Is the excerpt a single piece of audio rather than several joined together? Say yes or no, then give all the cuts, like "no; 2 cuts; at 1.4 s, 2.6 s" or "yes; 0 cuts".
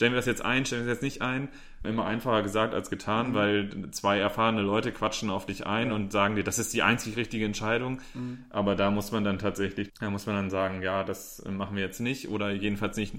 no; 2 cuts; at 1.8 s, 9.9 s